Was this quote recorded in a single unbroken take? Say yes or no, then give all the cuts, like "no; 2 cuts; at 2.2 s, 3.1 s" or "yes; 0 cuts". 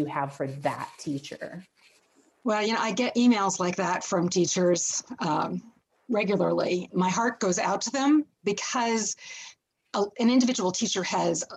no; 1 cut; at 6.9 s